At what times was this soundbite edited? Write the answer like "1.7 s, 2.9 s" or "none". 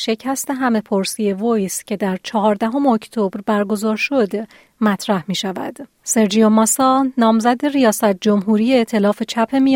5.9 s